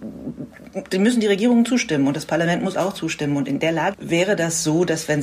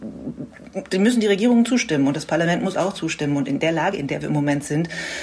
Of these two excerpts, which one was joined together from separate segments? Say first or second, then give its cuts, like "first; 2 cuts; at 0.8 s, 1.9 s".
first; 1 cut; at 3.9 s